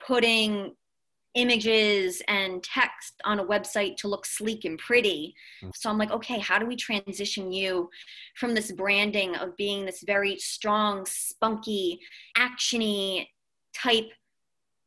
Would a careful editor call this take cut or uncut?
cut